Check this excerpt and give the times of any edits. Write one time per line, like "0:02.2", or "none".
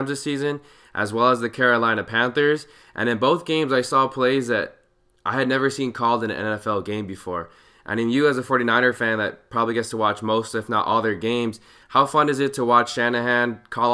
none